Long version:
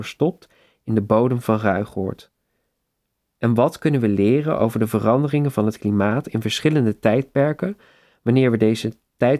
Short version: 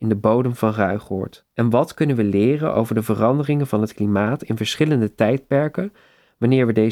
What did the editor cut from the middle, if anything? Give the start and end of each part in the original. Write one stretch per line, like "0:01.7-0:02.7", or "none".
0:02.3-0:03.3